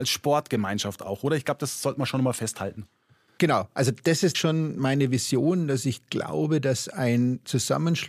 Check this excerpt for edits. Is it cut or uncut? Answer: cut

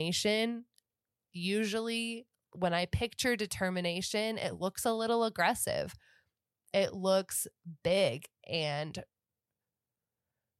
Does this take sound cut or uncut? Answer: uncut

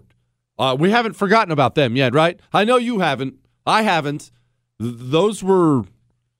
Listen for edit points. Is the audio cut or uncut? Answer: uncut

